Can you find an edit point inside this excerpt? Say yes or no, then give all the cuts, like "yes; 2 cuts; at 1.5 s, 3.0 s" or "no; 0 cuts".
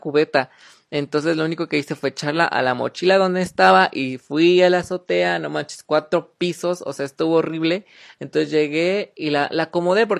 no; 0 cuts